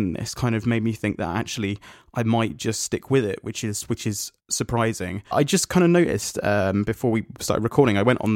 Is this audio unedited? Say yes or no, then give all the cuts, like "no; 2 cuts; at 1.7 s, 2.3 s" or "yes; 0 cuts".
no; 1 cut; at 5.3 s